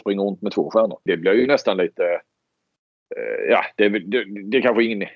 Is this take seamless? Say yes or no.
no